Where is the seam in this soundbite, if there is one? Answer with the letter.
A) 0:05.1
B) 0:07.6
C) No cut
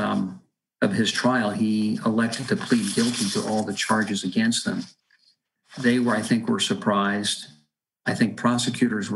C